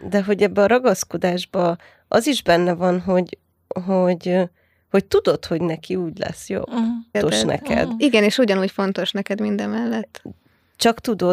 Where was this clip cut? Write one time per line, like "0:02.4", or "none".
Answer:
0:07.1

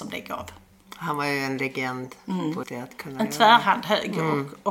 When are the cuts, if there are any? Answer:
0:02.6

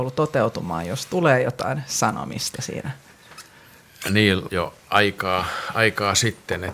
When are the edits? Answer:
0:04.5

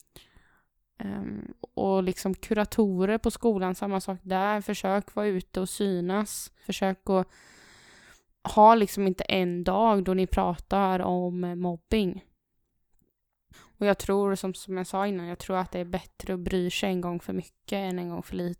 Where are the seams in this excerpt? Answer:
0:06.6
0:13.5

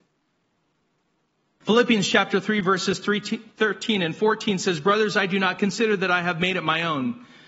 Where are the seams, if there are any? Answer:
0:01.6

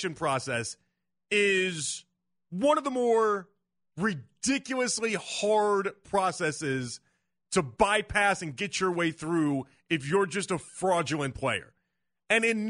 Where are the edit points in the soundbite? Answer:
none

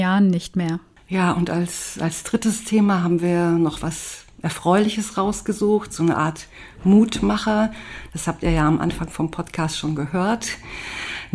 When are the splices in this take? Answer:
none

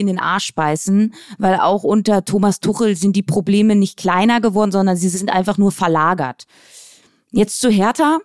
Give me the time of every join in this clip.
none

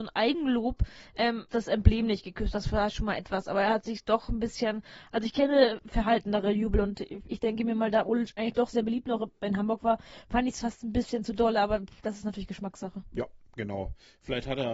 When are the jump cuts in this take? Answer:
0:01.5

